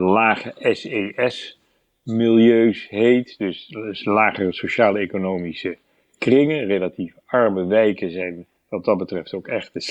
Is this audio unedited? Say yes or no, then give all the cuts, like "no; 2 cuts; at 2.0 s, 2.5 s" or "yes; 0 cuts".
yes; 0 cuts